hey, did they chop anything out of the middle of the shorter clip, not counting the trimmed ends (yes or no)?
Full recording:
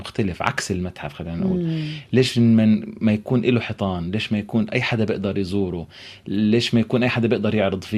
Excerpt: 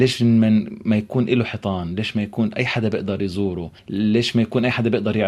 yes